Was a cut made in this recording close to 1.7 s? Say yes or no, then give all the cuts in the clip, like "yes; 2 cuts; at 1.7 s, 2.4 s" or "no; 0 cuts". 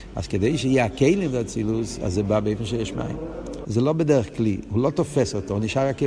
no; 1 cut; at 3.6 s